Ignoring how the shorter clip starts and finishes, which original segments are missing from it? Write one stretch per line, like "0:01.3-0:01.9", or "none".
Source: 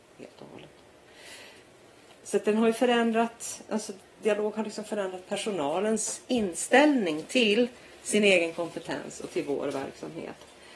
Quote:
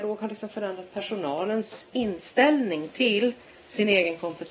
none